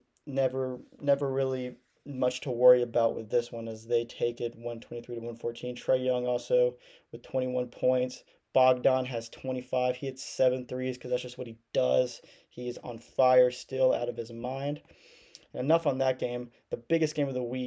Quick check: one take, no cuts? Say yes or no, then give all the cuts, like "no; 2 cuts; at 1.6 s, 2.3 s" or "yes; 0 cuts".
yes; 0 cuts